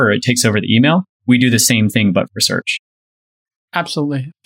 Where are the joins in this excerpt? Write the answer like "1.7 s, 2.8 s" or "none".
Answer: none

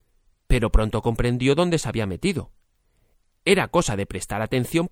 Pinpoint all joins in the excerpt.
none

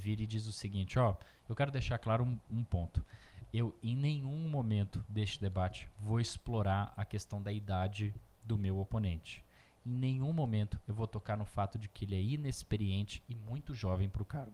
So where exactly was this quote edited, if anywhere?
none

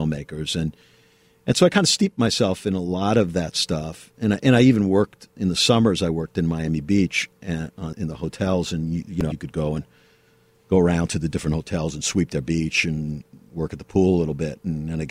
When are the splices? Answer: 9.3 s

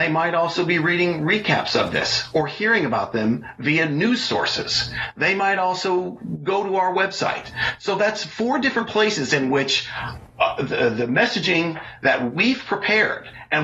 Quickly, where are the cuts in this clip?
none

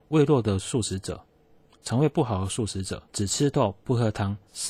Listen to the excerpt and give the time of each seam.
3.1 s

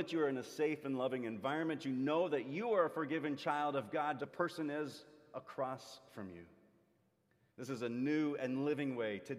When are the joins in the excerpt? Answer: 4.2 s

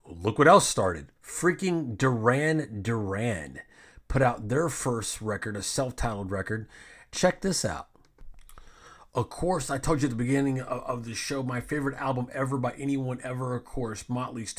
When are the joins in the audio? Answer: 1.1 s, 7.1 s

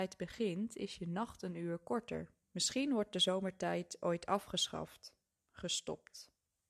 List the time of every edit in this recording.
2.4 s

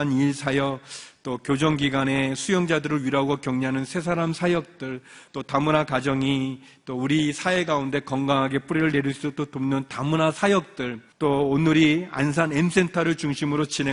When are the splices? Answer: 5.3 s, 11.1 s

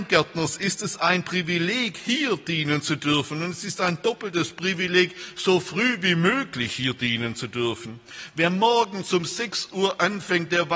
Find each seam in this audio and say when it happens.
none

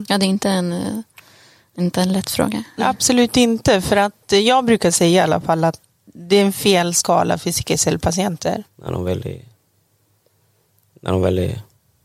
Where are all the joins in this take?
2.8 s, 8.7 s

